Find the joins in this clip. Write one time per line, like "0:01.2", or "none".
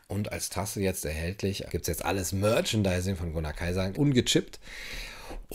0:01.7
0:03.9

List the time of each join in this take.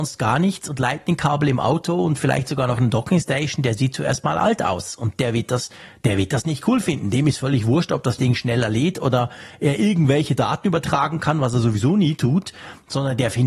none

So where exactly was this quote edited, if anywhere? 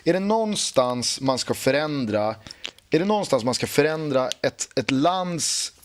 0:02.8

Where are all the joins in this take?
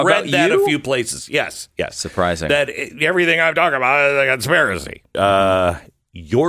0:05.1

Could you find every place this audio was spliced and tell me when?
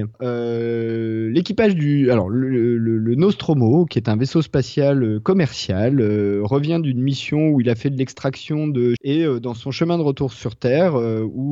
0:09.0

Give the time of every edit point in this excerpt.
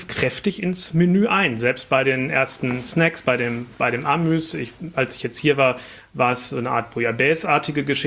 none

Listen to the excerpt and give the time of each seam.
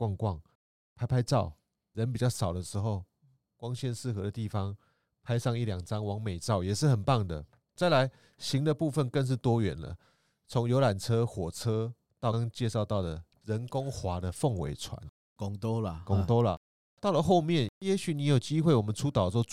0:03.4
0:12.3

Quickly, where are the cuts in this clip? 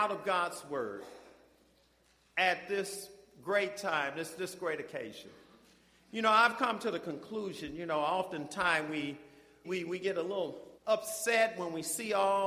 0:09.6
0:10.8

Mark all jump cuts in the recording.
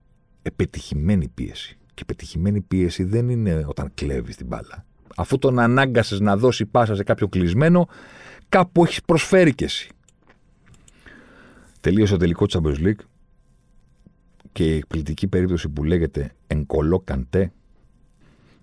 0:05.1
0:16.4

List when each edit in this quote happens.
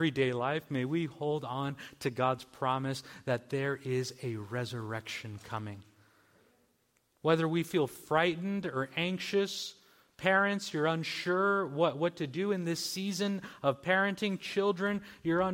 none

